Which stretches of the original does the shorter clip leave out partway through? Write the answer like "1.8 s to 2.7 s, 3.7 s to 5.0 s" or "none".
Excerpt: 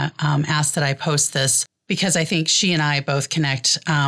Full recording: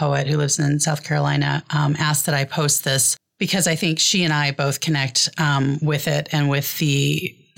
none